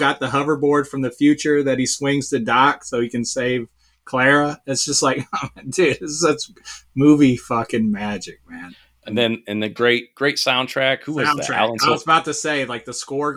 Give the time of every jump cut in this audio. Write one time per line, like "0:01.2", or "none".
none